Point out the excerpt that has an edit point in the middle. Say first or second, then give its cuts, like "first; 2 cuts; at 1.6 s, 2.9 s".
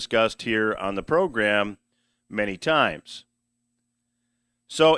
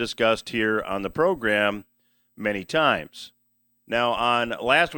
second; 1 cut; at 3.8 s